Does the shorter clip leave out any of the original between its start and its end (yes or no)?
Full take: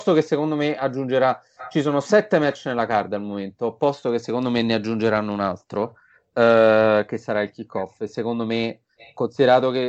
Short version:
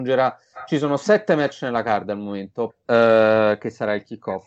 yes